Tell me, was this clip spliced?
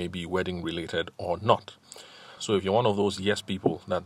yes; 1 cut; at 2.4 s

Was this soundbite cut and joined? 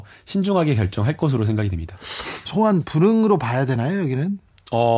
yes; 1 cut; at 2.5 s

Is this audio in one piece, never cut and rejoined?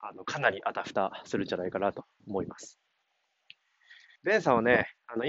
no; 1 cut; at 4.2 s

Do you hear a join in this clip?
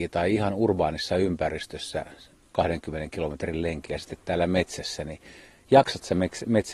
no; 0 cuts

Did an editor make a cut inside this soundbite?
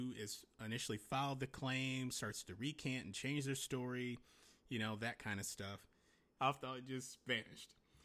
yes; 1 cut; at 6.4 s

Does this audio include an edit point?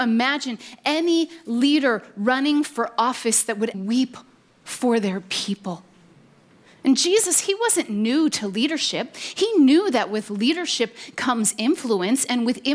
yes; 1 cut; at 3.7 s

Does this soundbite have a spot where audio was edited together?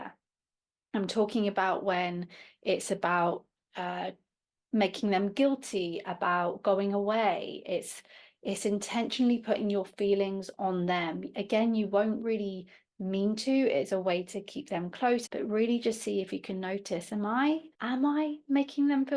yes; 2 cuts; at 15.3 s, 17.7 s

